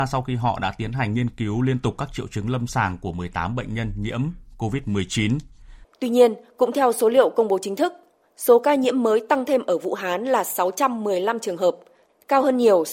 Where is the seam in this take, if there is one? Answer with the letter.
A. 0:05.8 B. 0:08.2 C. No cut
A